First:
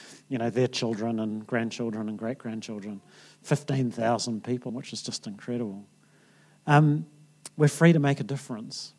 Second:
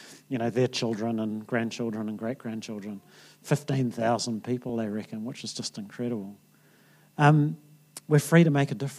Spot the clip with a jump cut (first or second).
first